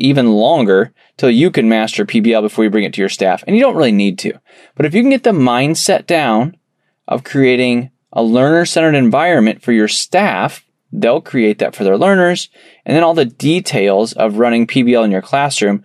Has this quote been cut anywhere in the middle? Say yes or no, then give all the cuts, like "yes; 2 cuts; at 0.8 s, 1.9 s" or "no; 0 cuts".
no; 0 cuts